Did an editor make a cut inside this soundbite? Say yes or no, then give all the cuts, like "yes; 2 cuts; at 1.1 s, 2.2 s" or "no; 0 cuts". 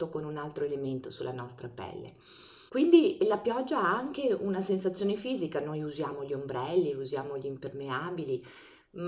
yes; 1 cut; at 2.7 s